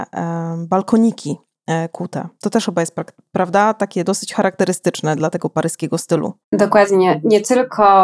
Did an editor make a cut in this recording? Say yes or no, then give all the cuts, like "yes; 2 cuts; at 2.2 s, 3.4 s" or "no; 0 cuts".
yes; 2 cuts; at 5.2 s, 6.4 s